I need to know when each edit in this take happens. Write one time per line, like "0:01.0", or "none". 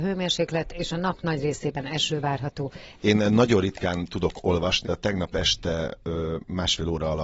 0:03.0
0:04.8

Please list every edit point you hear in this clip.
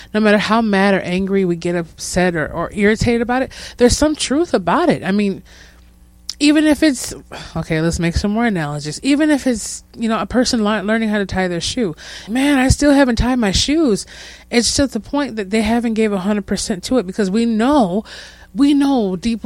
0:12.3

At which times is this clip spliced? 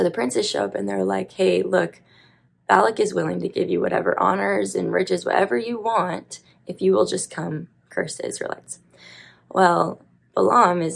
none

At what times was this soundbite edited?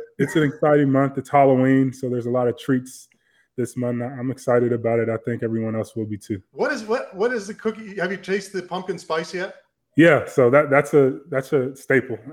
0:06.4

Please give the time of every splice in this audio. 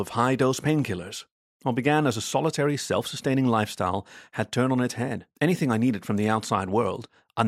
0:01.5
0:05.3

